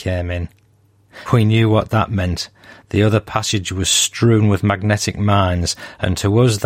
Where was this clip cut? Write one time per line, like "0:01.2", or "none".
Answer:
0:01.3